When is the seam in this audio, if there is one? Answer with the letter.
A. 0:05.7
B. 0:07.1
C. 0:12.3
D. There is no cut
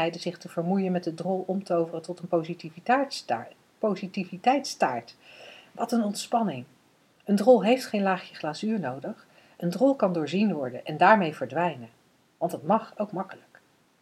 D